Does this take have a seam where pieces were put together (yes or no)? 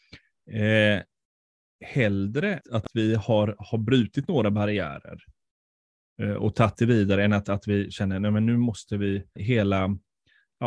yes